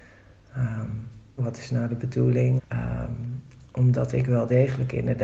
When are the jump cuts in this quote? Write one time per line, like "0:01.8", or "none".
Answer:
0:01.4
0:02.6